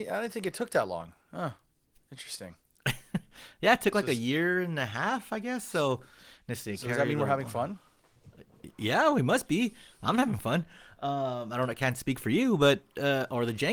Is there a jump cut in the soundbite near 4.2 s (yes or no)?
no